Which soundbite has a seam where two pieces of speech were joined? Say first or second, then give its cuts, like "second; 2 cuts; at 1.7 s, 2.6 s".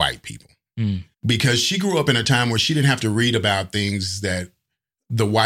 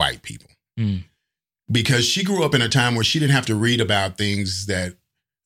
first; 1 cut; at 1.1 s